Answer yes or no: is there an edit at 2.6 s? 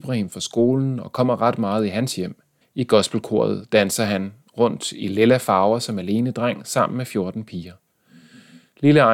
yes